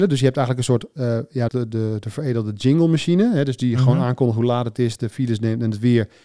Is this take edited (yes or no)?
yes